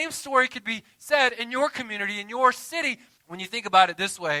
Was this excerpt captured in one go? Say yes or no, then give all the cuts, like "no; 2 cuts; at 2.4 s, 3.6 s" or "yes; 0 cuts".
no; 1 cut; at 3.2 s